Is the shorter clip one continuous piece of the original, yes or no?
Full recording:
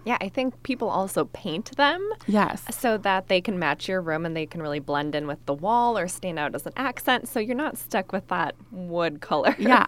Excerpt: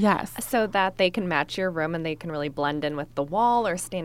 yes